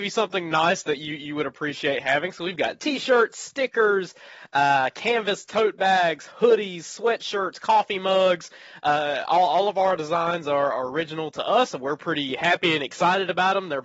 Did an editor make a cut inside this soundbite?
no; 0 cuts

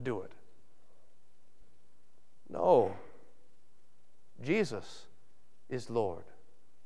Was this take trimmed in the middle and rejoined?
yes; 1 cut; at 1.6 s

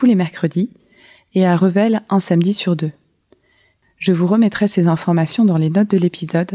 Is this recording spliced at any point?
yes; 1 cut; at 3.8 s

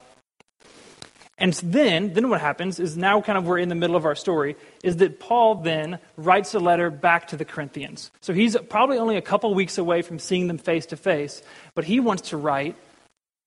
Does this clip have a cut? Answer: no; 0 cuts

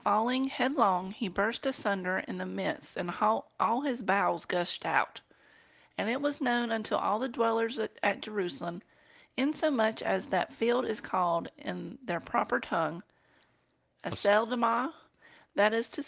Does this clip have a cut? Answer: no; 0 cuts

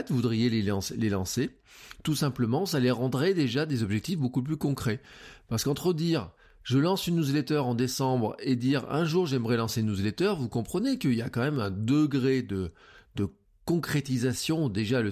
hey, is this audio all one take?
yes; 0 cuts

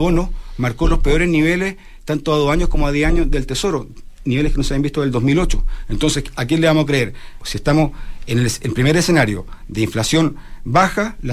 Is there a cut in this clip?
yes; 1 cut; at 7.4 s

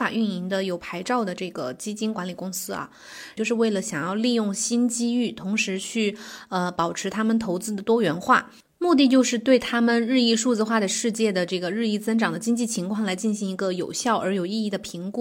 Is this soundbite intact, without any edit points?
no; 1 cut; at 3.4 s

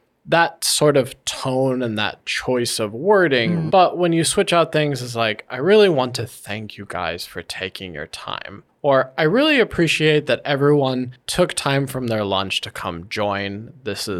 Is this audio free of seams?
no; 1 cut; at 3.7 s

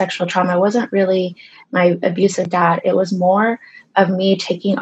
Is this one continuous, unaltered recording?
yes; 0 cuts

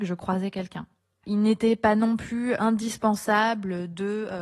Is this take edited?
yes; 2 cuts; at 1.2 s, 2.6 s

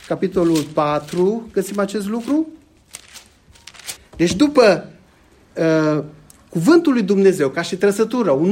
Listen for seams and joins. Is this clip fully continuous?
no; 1 cut; at 4.0 s

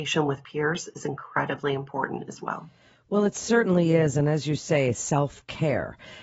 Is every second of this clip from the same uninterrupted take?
yes; 0 cuts

